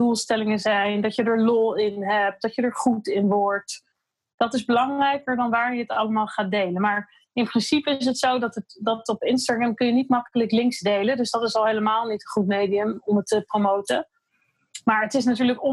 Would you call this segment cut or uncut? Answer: uncut